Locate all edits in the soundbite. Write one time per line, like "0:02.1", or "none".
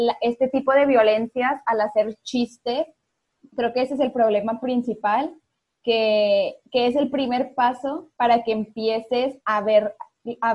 0:03.4
0:08.1
0:09.4

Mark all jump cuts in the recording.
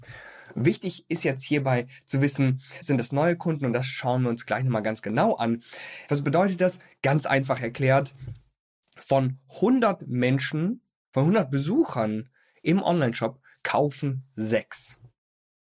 0:02.8
0:06.1

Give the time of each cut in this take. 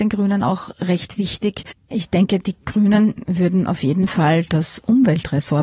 0:01.7

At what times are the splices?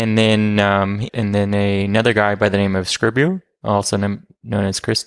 0:01.1

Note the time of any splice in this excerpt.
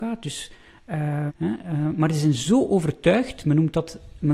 0:01.3

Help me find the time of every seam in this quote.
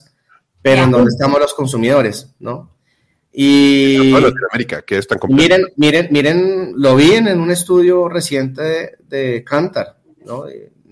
none

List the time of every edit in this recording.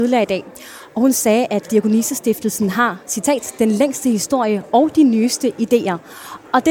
none

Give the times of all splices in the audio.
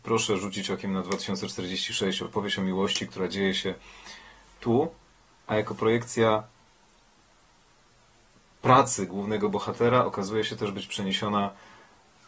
none

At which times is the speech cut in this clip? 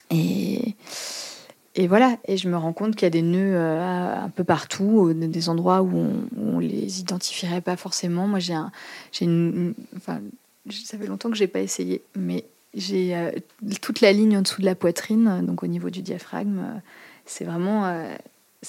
0:12.1

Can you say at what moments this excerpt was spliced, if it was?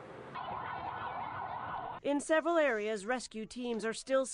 0:02.0

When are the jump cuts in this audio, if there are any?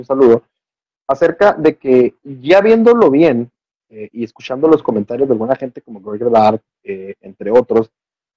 none

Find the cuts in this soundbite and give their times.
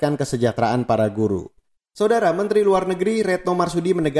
0:01.8

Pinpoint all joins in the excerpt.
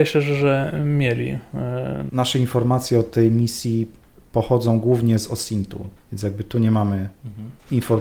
0:02.1
0:06.0

